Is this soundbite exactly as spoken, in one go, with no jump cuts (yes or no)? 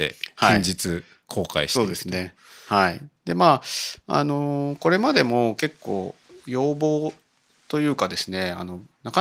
yes